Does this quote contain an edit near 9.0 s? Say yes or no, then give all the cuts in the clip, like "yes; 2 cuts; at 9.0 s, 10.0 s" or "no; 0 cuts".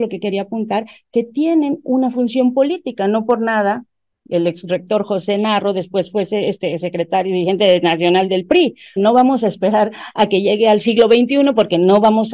yes; 1 cut; at 9.0 s